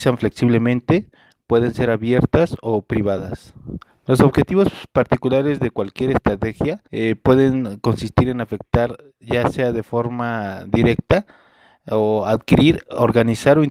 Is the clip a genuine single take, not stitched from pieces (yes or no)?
no